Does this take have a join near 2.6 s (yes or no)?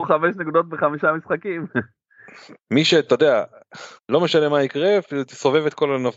yes